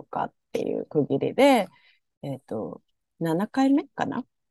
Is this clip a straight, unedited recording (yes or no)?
no